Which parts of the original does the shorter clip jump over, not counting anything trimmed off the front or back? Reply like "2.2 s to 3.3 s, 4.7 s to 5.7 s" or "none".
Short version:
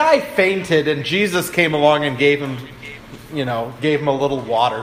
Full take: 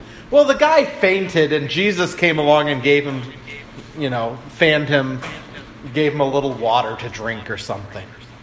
4.4 s to 5.9 s